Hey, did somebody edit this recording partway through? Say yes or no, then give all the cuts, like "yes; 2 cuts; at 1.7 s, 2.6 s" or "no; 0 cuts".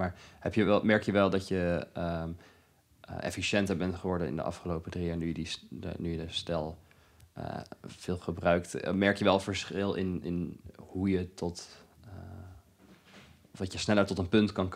no; 0 cuts